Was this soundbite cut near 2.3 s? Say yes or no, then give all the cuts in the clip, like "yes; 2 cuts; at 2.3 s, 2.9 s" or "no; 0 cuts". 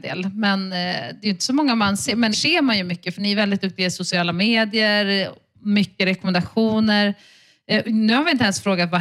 yes; 1 cut; at 2.3 s